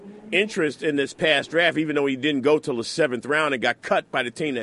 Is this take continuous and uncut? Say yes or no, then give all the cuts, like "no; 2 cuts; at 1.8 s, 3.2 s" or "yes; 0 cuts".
yes; 0 cuts